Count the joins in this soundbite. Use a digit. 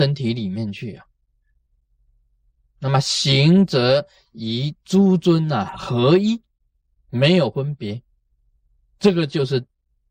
1